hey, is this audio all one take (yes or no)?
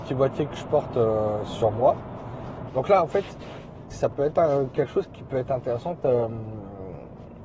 no